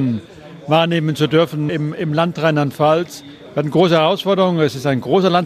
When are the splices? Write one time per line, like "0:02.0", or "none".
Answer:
0:01.7